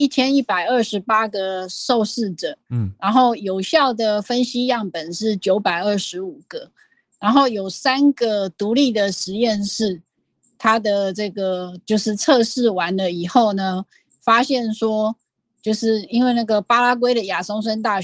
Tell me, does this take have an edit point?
no; 0 cuts

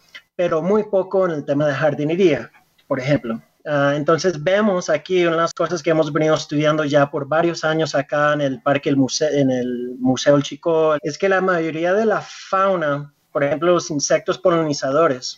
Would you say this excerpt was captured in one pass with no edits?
no; 2 cuts; at 11.0 s, 13.3 s

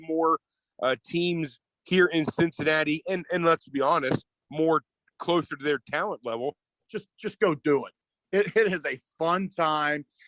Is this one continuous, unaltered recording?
no; 1 cut; at 6.8 s

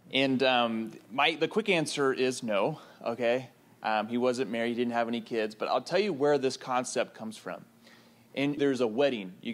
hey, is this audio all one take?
no; 1 cut; at 8.6 s

